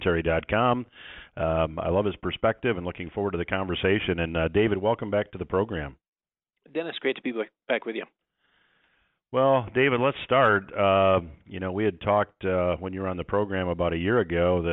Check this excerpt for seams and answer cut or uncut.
uncut